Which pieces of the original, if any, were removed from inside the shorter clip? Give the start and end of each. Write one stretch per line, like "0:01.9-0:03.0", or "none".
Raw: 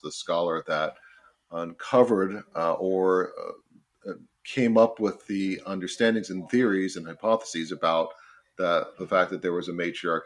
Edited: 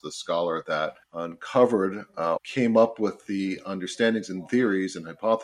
0:01.0-0:01.4
0:02.7-0:04.4